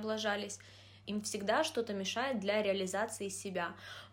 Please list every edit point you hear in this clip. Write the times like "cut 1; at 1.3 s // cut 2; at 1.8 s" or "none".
cut 1; at 1.0 s